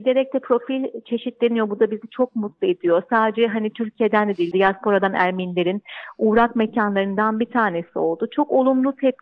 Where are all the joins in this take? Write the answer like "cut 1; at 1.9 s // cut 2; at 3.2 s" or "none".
cut 1; at 4.5 s